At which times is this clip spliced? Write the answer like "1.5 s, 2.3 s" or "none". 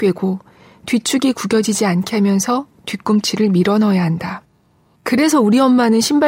4.9 s